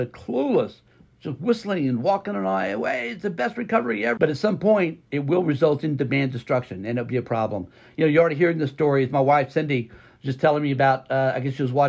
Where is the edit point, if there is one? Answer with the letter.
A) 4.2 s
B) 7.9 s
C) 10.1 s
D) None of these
A